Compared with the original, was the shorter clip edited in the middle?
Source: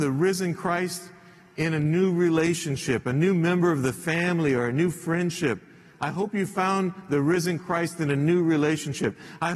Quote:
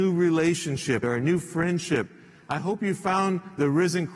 yes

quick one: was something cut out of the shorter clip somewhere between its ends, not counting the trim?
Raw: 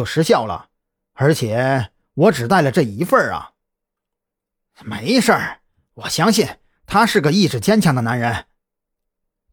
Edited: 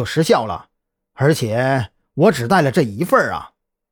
no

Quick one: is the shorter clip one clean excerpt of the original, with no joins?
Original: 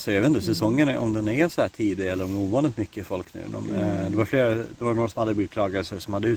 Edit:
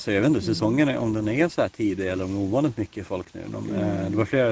yes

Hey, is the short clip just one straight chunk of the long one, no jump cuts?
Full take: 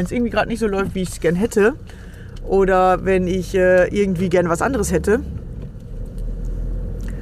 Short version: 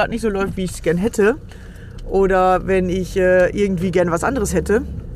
yes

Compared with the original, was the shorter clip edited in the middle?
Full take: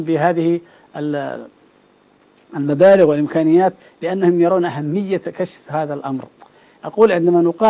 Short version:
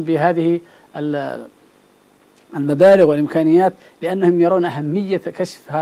no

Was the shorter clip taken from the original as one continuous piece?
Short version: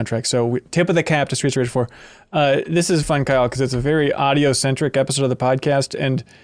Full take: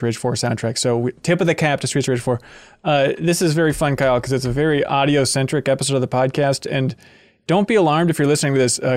no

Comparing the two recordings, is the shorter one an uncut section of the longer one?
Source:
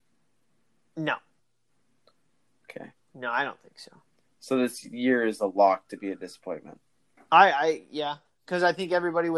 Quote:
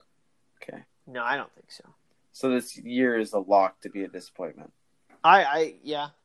yes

